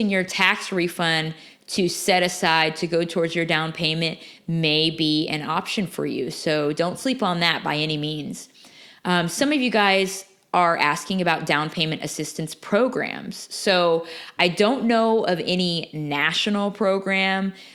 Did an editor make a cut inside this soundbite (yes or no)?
no